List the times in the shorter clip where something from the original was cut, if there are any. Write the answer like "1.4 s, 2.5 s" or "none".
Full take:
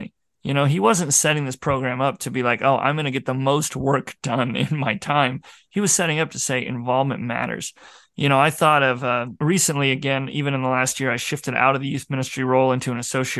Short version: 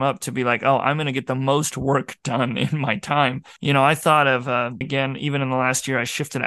3.6 s, 4.8 s